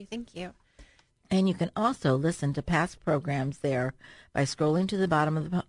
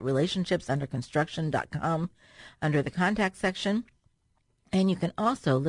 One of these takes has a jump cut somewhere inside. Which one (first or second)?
first